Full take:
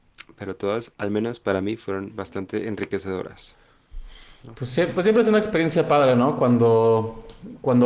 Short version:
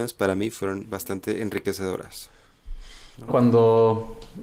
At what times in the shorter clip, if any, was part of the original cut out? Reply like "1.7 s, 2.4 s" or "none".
3.3 s